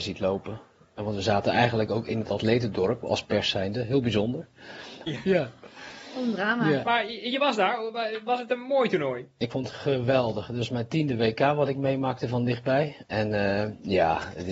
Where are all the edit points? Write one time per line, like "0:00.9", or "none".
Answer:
0:05.1